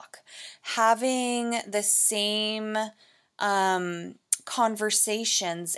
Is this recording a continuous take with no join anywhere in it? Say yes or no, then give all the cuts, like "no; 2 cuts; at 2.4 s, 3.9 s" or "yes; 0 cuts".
yes; 0 cuts